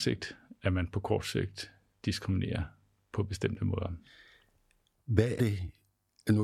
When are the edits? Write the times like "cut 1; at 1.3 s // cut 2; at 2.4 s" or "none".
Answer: cut 1; at 5.4 s